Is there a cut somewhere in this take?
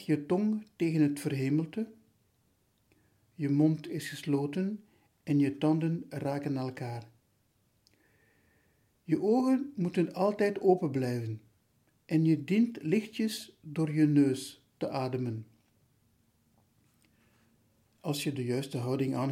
no; 0 cuts

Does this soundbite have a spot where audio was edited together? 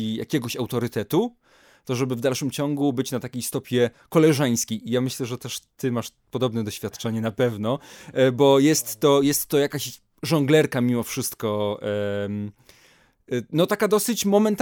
no; 0 cuts

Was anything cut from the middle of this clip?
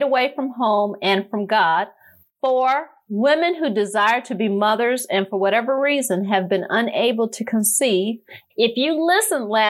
yes; 1 cut; at 8.5 s

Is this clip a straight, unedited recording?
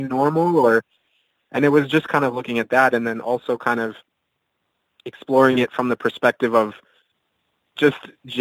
yes; 0 cuts

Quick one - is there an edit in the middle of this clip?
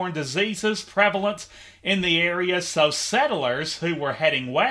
no; 0 cuts

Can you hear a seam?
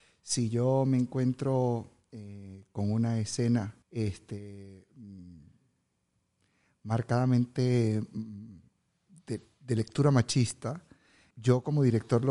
yes; 2 cuts; at 3.8 s, 11.3 s

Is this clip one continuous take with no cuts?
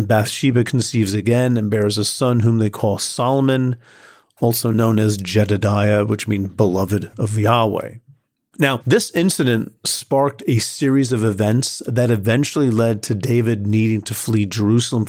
yes; 0 cuts

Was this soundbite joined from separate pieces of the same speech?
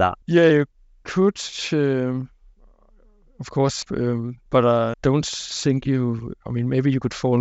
yes; 2 cuts; at 3.8 s, 4.9 s

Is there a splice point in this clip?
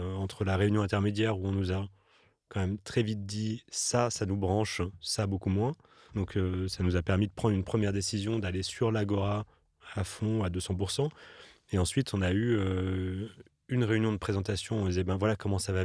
no; 0 cuts

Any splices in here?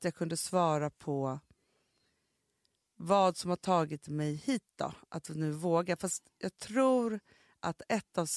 no; 0 cuts

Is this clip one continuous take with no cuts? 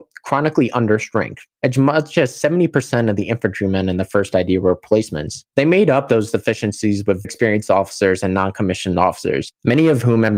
no; 1 cut; at 7.2 s

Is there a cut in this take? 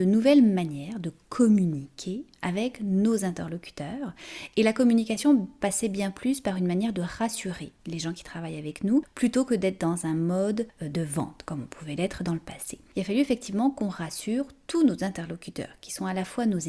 yes; 1 cut; at 7.8 s

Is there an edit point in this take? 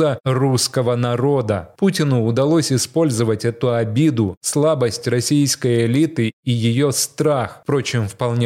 no; 0 cuts

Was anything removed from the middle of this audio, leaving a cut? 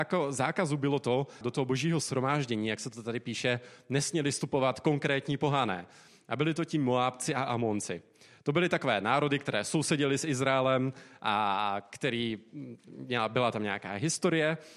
yes; 1 cut; at 1.4 s

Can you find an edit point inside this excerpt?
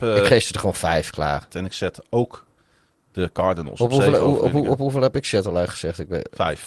yes; 1 cut; at 1.5 s

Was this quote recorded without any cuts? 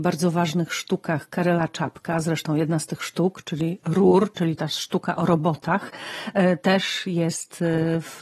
yes; 0 cuts

